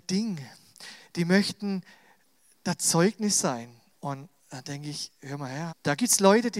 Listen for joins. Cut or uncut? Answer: cut